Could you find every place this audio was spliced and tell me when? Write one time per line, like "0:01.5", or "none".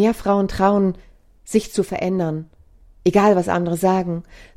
none

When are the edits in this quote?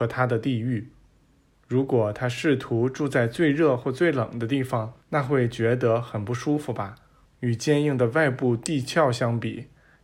0:05.0
0:07.2

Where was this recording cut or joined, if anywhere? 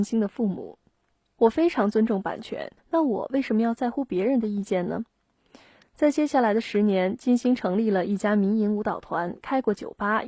0:02.8

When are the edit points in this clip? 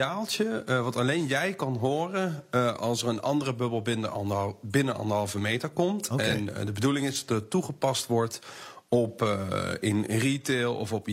none

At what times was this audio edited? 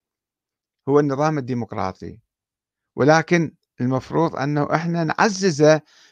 none

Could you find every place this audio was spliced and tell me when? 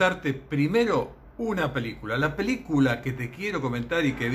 none

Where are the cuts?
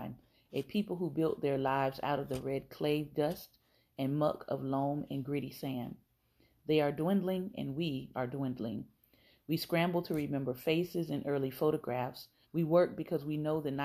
0:08.1
0:12.4

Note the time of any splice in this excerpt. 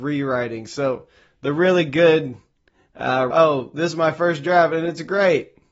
0:03.3

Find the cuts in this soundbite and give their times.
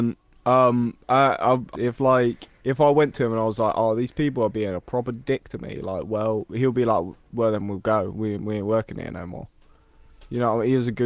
0:01.7

